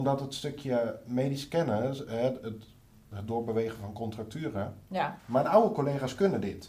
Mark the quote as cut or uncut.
cut